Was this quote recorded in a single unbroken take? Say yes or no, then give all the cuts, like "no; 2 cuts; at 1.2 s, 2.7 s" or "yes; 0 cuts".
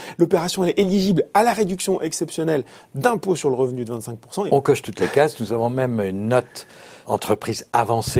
no; 2 cuts; at 4.5 s, 7.0 s